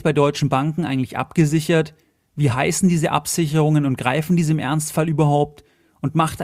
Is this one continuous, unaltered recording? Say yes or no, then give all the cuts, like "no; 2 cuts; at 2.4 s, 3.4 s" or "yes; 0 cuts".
yes; 0 cuts